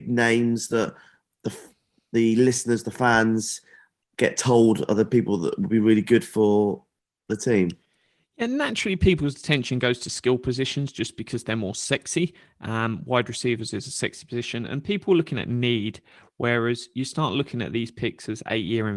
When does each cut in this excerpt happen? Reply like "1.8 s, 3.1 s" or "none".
none